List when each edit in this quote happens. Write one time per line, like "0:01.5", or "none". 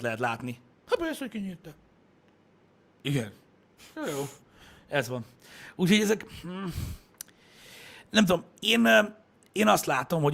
none